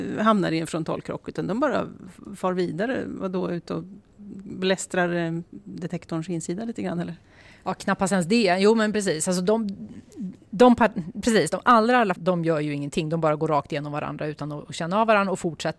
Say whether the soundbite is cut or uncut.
cut